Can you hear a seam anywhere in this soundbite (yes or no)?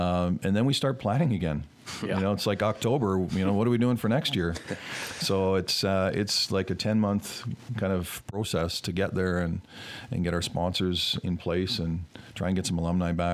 no